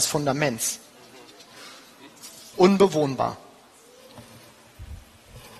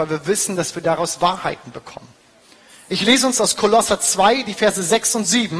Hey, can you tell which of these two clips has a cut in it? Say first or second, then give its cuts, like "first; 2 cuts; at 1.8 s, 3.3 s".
first; 1 cut; at 2.5 s